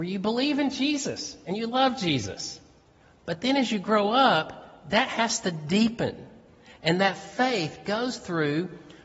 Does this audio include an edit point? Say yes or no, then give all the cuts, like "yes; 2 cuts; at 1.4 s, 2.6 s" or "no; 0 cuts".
no; 0 cuts